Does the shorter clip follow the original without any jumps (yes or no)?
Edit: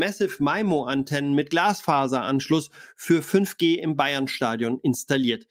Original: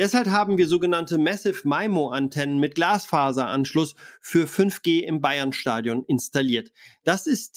yes